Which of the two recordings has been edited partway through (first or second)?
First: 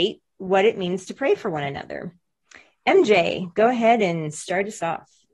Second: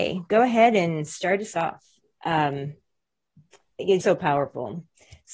second